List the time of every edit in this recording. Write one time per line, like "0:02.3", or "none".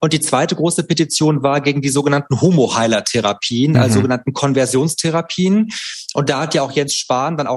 none